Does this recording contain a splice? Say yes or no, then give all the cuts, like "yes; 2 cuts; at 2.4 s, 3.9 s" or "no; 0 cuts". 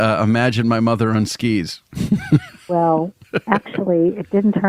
no; 0 cuts